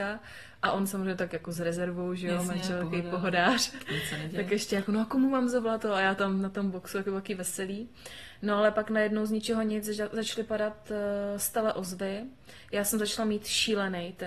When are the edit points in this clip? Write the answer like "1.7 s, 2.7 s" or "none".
none